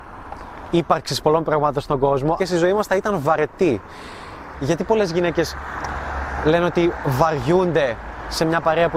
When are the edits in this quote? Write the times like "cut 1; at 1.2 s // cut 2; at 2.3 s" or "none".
cut 1; at 2.4 s // cut 2; at 4.5 s